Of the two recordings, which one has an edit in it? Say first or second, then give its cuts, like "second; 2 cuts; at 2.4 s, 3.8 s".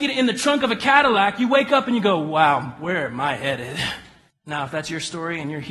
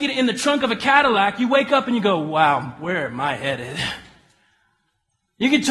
first; 1 cut; at 4.3 s